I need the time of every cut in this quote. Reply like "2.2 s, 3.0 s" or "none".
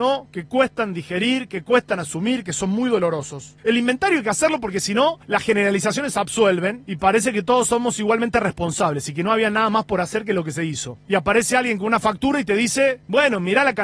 none